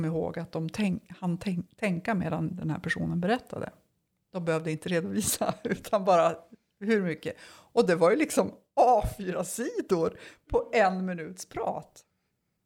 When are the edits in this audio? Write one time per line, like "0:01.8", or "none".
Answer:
none